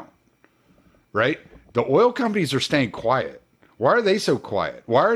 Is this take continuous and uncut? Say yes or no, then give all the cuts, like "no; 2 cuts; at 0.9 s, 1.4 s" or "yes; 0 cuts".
yes; 0 cuts